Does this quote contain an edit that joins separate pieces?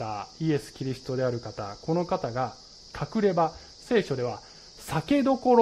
no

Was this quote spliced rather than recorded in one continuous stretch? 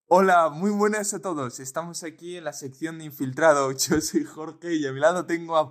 no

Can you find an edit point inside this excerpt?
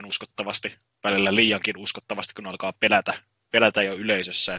no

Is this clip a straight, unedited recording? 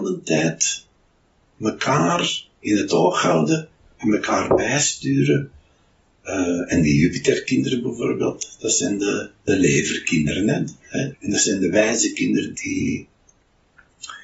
no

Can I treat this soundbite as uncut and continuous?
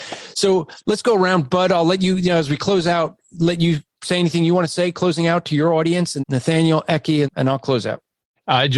no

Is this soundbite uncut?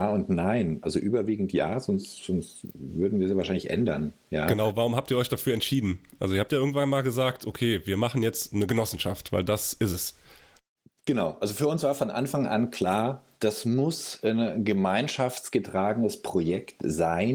yes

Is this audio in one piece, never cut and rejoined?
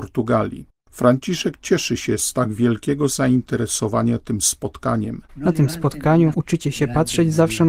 no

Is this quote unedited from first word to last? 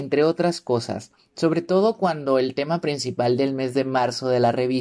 yes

